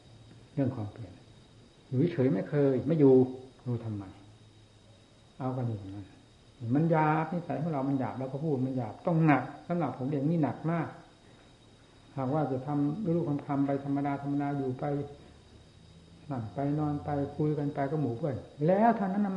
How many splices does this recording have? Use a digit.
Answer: 1